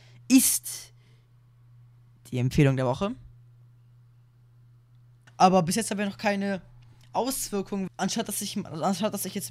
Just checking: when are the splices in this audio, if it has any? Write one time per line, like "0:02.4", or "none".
0:05.3
0:07.9